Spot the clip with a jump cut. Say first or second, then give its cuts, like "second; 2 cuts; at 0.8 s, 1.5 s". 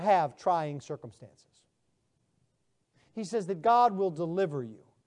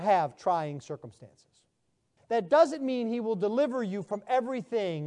second; 1 cut; at 2.2 s